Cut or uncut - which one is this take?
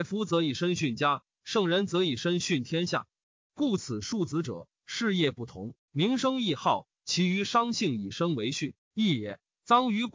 uncut